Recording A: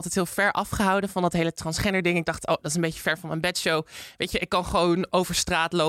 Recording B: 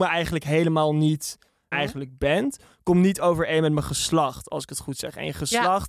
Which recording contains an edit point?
B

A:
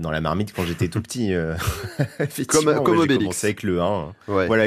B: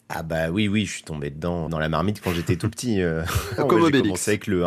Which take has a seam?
B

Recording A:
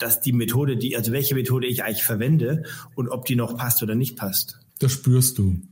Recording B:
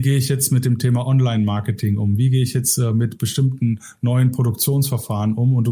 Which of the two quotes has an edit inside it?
A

